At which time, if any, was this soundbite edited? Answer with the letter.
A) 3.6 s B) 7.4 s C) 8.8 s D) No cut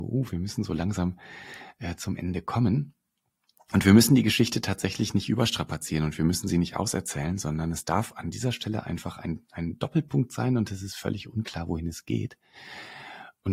D